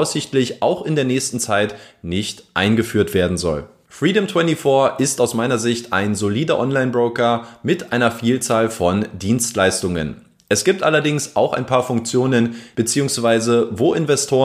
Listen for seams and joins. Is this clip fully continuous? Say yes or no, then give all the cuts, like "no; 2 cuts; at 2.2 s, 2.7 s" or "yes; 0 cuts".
no; 1 cut; at 12.7 s